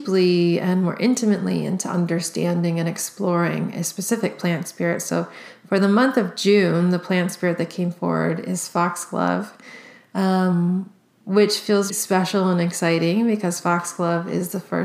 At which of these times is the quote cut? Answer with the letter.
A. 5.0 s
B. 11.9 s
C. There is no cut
B